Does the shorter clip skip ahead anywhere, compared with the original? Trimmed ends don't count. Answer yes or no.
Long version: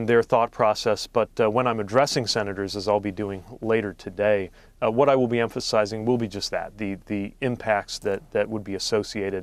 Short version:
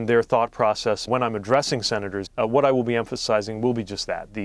yes